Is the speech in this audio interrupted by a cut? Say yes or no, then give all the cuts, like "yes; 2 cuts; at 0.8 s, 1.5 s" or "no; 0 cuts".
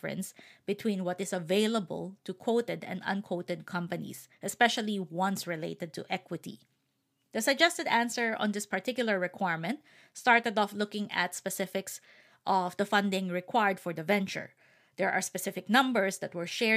no; 0 cuts